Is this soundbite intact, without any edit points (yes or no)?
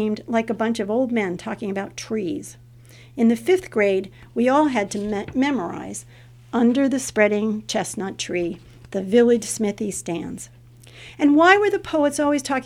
yes